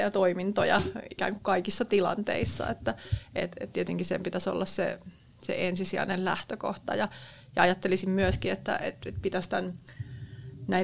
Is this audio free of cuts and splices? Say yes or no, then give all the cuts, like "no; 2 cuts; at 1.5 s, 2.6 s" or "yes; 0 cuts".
yes; 0 cuts